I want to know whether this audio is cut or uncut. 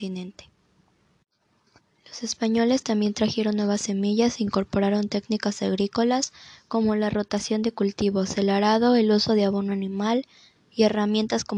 uncut